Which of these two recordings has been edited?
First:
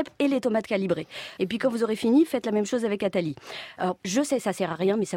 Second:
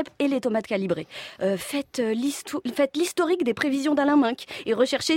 first; 2 cuts; at 1.4 s, 4.0 s

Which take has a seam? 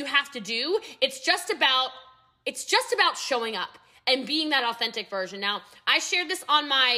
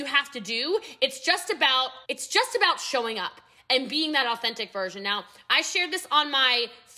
second; 1 cut; at 2.0 s

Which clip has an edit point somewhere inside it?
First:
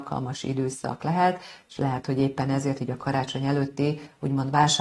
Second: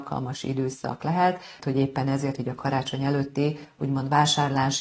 second; 1 cut; at 1.6 s

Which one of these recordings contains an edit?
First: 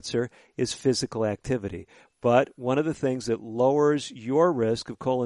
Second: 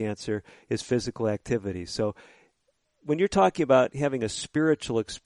first; 1 cut; at 2.0 s

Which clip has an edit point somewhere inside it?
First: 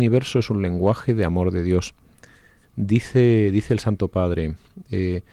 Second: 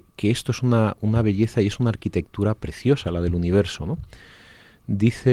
first; 1 cut; at 2.6 s

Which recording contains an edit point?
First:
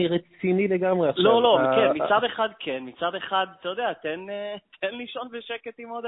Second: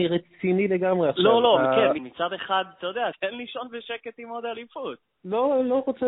second; 2 cuts; at 2.0 s, 3.1 s

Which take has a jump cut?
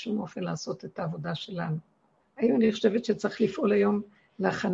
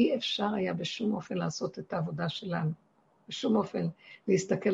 first; 1 cut; at 2.2 s

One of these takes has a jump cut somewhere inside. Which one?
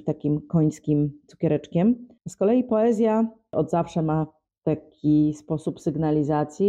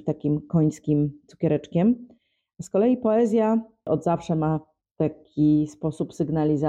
first; 1 cut; at 2.2 s

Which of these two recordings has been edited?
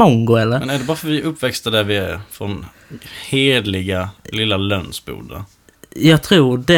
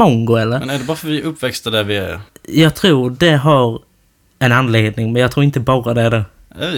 second; 1 cut; at 2.3 s

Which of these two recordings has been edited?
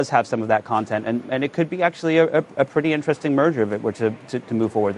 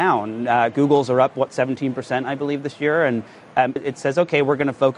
second; 1 cut; at 3.8 s

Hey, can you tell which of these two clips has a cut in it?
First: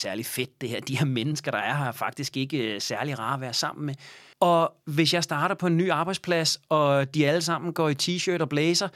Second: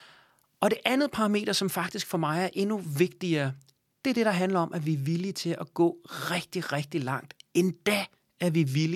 first; 1 cut; at 4.3 s

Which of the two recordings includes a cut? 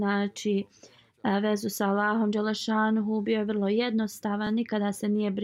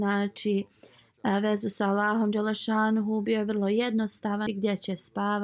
second; 1 cut; at 4.5 s

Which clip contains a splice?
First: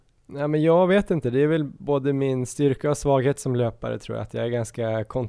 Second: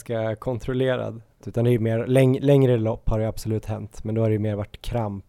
second; 1 cut; at 1.4 s

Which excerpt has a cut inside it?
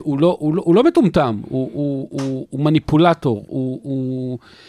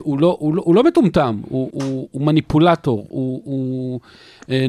second; 1 cut; at 1.7 s

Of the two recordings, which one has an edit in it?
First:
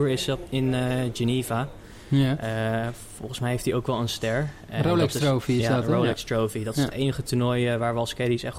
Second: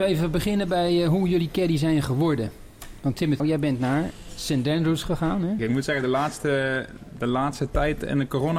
second; 2 cuts; at 3.4 s, 5.6 s

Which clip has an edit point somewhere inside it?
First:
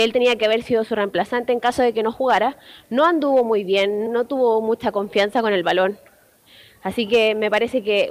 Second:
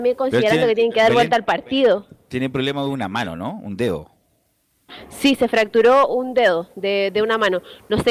first; 1 cut; at 4.1 s

